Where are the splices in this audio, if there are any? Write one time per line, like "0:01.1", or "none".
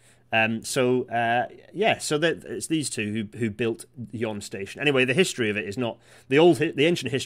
none